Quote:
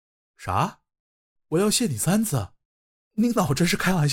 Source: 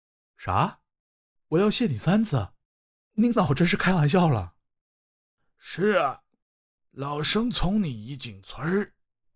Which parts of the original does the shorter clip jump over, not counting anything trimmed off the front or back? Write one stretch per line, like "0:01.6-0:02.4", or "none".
none